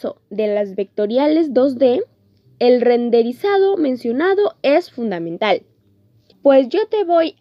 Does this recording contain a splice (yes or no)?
yes